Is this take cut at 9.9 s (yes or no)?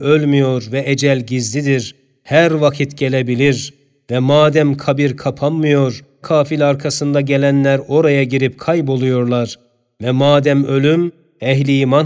no